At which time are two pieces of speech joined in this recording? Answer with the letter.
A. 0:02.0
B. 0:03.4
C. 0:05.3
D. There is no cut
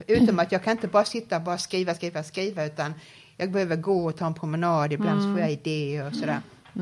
D